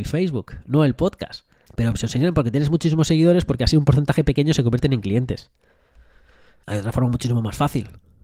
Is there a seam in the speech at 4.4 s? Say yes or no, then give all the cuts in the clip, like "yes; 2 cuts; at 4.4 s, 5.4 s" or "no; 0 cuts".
no; 2 cuts; at 1.7 s, 6.6 s